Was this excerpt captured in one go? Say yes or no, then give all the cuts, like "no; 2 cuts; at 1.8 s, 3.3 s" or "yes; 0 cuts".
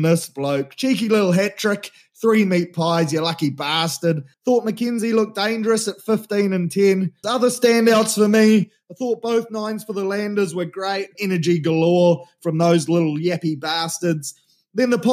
no; 3 cuts; at 4.3 s, 7.2 s, 11.1 s